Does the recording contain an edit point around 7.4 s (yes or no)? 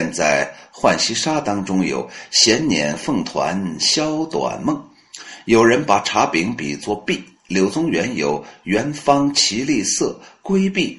no